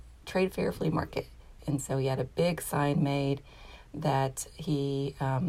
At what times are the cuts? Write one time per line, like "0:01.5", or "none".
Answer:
0:01.6

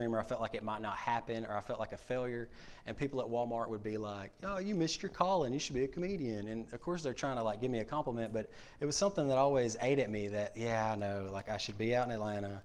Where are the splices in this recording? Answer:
none

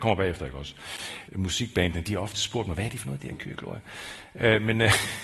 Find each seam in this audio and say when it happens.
0:01.3

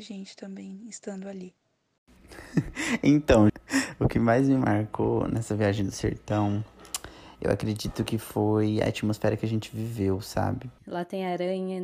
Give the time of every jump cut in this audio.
0:03.5
0:10.8

